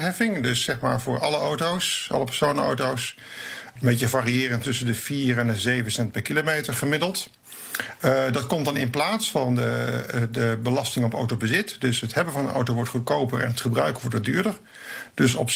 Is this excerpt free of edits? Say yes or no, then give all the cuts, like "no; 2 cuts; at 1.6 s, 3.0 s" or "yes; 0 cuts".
yes; 0 cuts